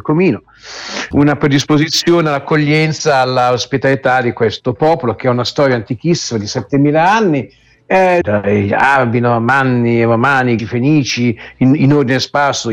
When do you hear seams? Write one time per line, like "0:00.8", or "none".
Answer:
0:01.1
0:08.2
0:10.6